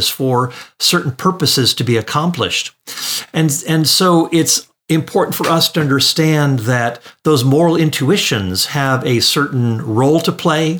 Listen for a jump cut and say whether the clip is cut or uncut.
uncut